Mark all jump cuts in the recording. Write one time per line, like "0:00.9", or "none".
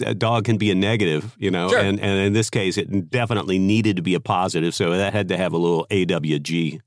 none